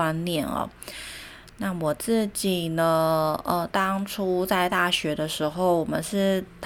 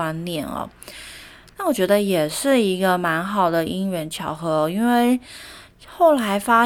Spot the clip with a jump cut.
second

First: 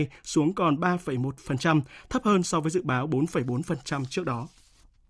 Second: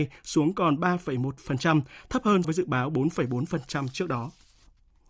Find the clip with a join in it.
second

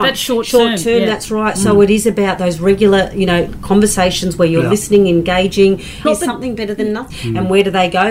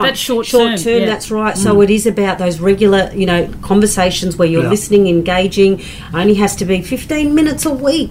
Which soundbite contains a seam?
first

